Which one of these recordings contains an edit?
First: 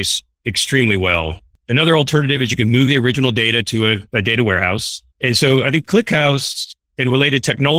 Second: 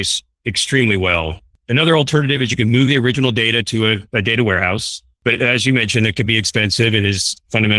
first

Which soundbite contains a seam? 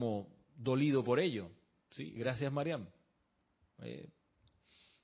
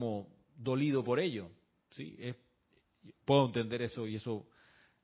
first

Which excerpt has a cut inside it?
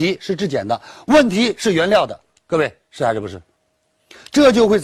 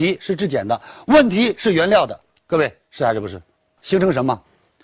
second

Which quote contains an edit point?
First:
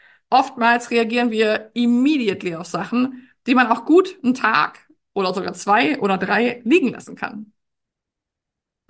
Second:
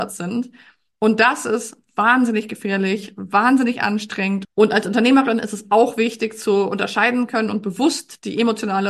second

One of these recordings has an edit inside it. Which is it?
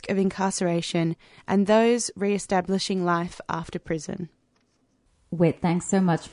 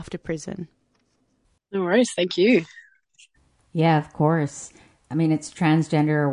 second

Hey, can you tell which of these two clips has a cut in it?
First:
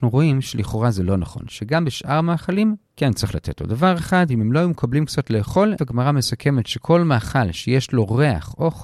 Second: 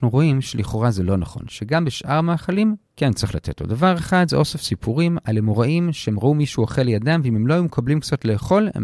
first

